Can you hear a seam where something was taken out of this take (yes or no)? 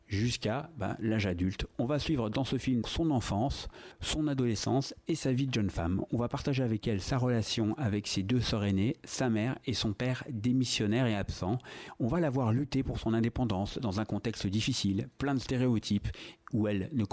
yes